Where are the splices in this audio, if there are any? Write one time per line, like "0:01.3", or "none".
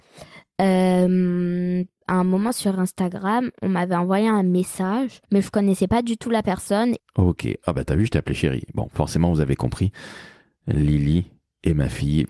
0:05.2
0:07.0